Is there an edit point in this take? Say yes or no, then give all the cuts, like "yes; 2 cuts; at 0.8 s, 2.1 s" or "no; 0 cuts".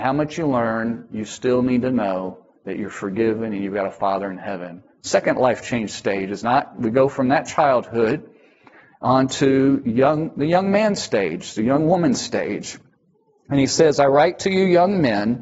no; 0 cuts